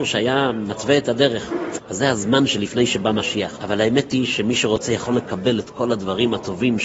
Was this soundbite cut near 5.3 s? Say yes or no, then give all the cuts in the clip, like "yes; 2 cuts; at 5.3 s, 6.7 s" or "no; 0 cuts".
no; 2 cuts; at 1.8 s, 3.6 s